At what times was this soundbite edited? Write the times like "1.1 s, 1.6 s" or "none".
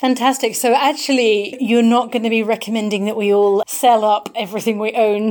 1.5 s, 3.6 s